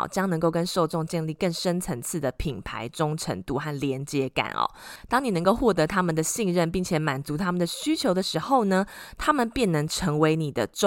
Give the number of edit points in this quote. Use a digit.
0